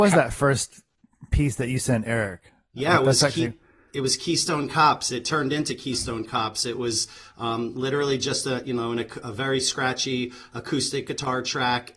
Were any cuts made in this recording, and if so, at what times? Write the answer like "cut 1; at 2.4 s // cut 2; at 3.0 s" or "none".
none